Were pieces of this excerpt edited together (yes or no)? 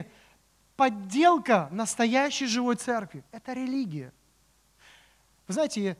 no